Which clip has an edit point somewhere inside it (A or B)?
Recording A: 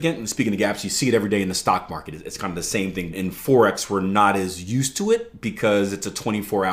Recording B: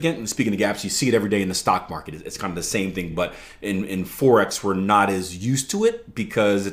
A